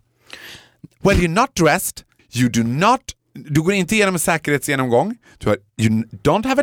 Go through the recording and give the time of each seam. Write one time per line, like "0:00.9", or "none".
0:02.2